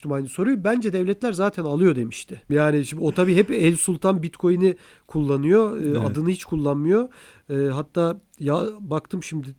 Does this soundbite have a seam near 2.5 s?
yes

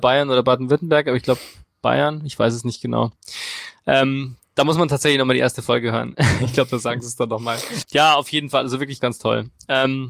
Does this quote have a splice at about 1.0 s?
no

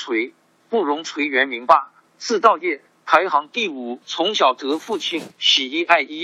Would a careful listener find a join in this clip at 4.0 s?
yes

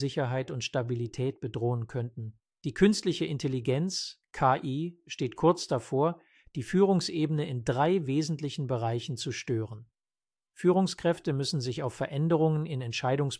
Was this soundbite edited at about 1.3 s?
no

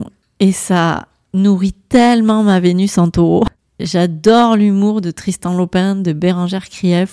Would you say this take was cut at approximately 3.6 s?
yes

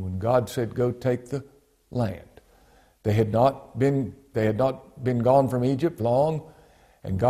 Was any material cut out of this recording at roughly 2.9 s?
no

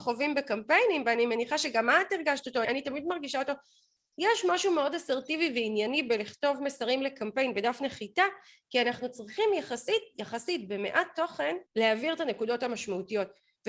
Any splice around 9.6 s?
no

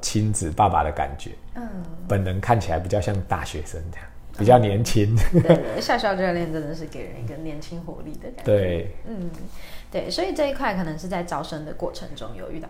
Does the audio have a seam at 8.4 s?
no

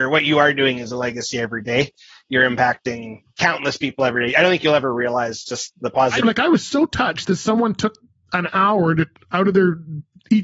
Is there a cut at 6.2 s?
yes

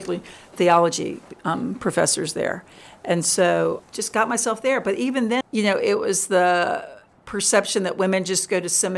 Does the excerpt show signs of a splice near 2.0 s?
no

